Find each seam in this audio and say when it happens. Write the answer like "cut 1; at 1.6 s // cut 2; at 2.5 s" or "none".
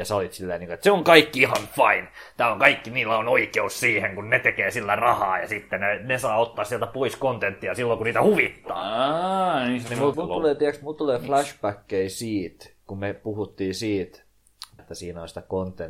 cut 1; at 10.1 s // cut 2; at 14.8 s